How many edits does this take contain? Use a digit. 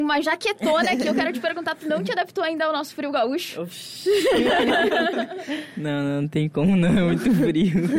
0